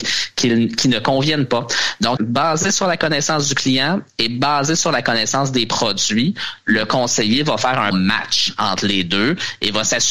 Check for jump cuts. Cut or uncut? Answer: cut